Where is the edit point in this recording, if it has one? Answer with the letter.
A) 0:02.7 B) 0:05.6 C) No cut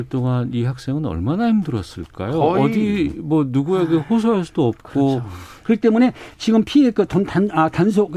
B